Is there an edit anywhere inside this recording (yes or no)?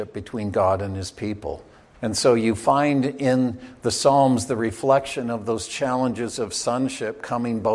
yes